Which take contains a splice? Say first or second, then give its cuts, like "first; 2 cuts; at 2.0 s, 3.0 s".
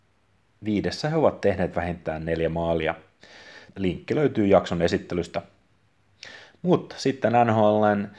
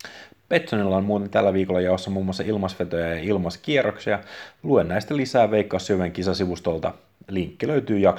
first; 1 cut; at 3.7 s